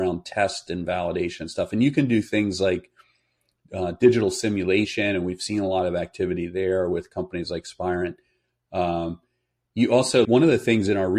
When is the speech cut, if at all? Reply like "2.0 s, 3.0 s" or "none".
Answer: 10.2 s